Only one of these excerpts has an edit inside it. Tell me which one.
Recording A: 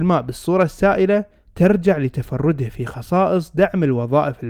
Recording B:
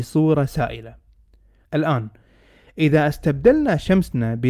B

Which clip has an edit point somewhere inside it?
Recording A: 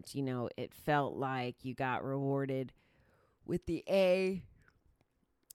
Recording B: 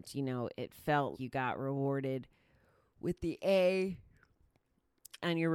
B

